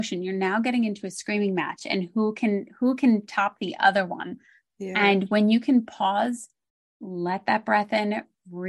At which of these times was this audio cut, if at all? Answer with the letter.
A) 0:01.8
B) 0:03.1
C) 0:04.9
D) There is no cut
D